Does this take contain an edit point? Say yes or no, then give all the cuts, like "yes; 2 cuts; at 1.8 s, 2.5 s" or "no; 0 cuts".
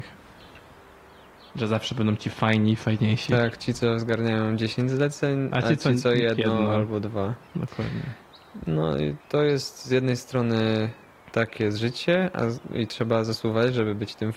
yes; 2 cuts; at 1.5 s, 9.2 s